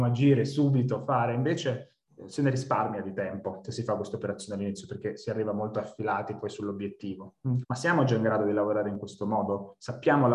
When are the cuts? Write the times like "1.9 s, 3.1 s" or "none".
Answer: 7.6 s